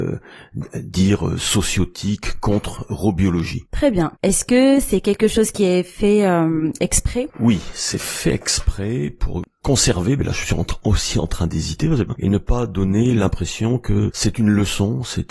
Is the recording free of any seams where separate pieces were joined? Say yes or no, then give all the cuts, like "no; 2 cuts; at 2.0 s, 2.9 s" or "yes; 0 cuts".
no; 2 cuts; at 4.2 s, 12.1 s